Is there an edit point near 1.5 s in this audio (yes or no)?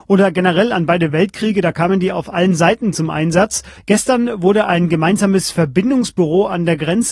no